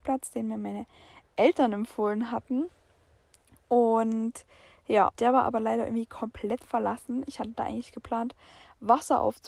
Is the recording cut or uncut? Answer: cut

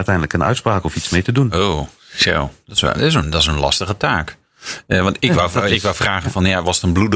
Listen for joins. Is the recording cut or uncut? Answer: uncut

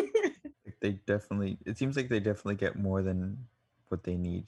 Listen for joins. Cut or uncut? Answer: uncut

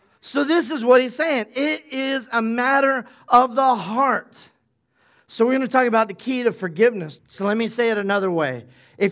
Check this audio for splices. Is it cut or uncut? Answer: cut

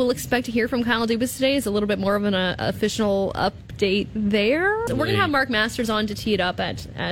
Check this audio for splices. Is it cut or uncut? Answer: cut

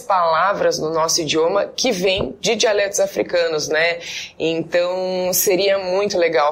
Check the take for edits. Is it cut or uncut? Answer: uncut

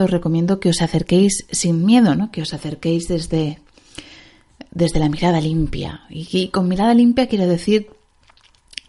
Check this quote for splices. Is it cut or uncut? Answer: uncut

